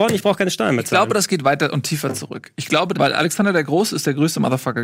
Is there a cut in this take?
yes; 1 cut; at 2.9 s

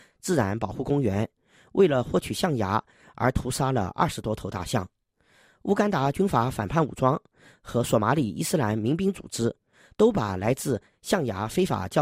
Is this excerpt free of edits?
yes; 0 cuts

